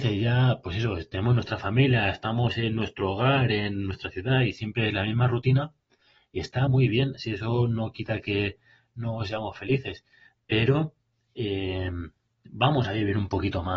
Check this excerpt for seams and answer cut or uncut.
uncut